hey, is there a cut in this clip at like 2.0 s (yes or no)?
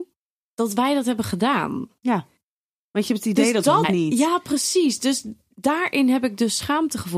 no